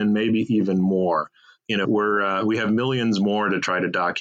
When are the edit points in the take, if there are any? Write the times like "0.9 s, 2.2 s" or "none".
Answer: 1.8 s